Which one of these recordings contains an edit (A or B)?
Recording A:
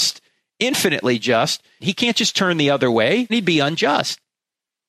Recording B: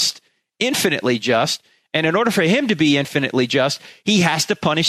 A